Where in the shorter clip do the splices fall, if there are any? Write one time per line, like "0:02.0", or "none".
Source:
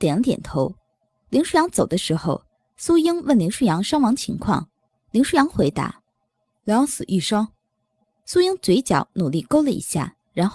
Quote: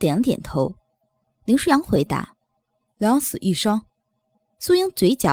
0:01.2